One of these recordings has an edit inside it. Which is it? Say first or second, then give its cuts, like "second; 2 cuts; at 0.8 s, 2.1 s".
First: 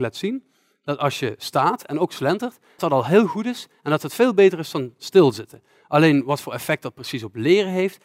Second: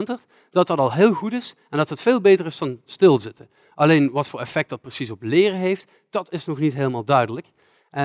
first; 1 cut; at 2.8 s